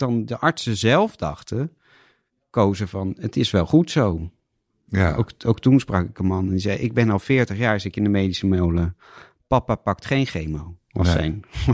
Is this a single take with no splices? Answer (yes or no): yes